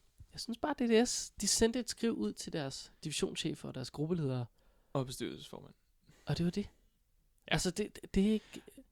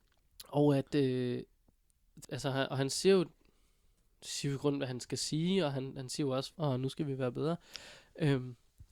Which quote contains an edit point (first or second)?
second